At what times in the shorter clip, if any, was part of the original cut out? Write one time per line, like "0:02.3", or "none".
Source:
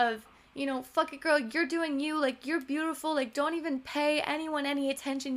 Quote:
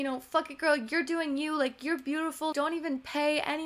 0:02.5